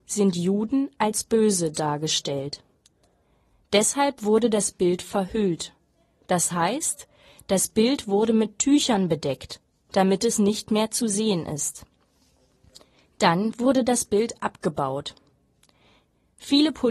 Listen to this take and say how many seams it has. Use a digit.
0